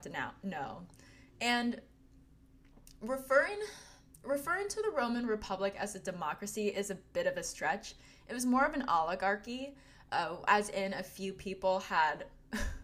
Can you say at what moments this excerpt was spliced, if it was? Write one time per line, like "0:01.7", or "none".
none